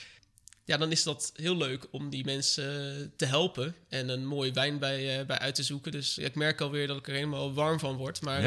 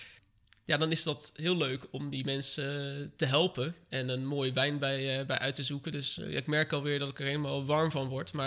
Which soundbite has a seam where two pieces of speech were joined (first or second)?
first